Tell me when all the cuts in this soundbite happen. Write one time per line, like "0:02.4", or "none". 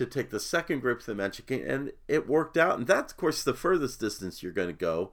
none